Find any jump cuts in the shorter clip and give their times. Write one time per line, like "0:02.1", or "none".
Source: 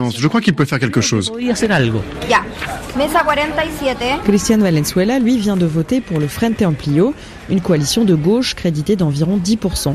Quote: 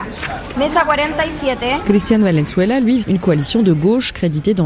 0:03.0